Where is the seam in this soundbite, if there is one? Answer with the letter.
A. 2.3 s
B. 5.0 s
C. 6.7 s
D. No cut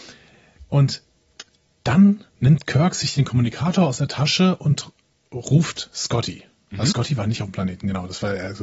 A